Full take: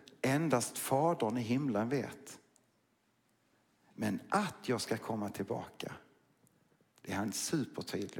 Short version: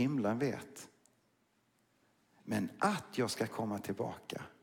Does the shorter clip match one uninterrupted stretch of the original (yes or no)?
yes